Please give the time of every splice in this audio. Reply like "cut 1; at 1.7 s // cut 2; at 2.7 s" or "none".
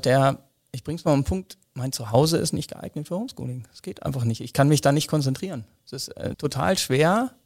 cut 1; at 1.7 s // cut 2; at 6.3 s